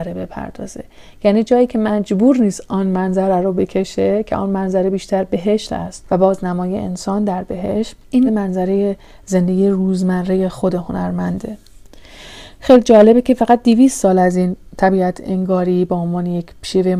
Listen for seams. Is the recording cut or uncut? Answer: cut